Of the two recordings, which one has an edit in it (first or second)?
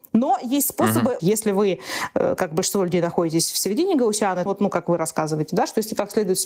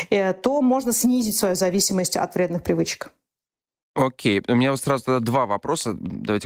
first